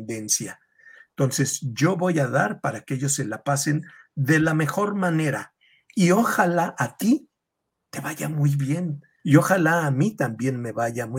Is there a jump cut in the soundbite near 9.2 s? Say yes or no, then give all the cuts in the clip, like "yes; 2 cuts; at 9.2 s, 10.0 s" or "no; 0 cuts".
yes; 1 cut; at 9.2 s